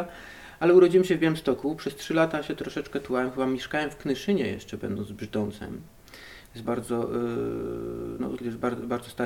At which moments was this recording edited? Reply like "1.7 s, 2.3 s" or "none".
6.6 s, 8.4 s